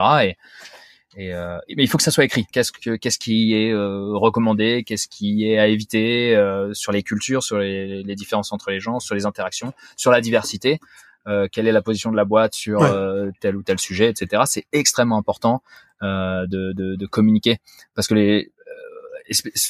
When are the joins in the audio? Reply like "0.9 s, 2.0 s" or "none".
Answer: 2.5 s